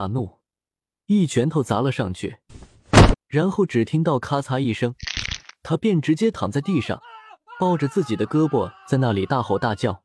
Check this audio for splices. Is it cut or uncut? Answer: cut